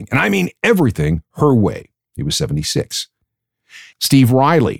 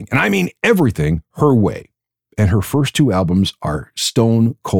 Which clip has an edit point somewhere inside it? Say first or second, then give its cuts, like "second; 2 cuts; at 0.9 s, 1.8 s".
first; 1 cut; at 2.0 s